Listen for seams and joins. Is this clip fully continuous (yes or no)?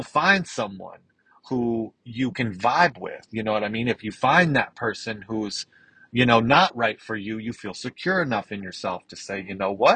yes